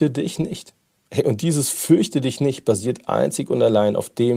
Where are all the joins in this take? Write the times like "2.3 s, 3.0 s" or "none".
none